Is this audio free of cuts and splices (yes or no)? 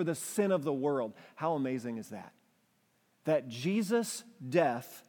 yes